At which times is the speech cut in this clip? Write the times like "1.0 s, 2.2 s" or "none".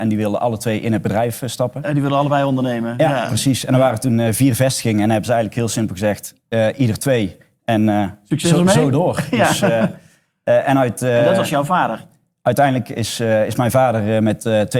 none